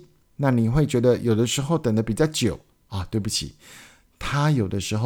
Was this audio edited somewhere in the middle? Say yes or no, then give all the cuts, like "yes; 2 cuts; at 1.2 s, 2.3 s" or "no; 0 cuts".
no; 0 cuts